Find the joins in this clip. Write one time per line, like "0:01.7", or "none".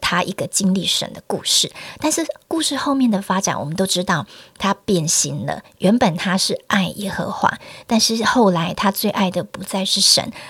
none